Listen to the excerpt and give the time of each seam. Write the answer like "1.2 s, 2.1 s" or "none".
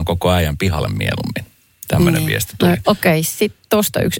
2.8 s